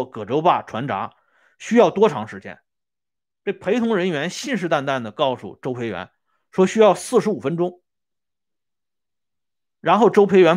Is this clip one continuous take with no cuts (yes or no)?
yes